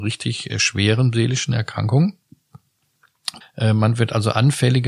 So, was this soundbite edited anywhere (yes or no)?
yes